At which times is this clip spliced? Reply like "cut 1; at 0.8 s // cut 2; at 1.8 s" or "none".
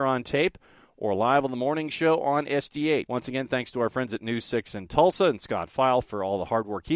cut 1; at 3.1 s